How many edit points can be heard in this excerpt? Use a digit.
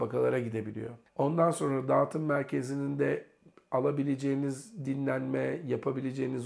1